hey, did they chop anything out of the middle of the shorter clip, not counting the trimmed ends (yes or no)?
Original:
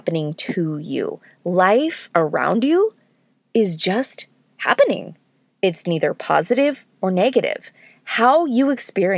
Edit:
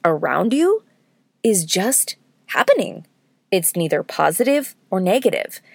no